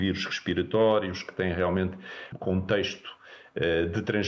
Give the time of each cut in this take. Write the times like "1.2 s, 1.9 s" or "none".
2.3 s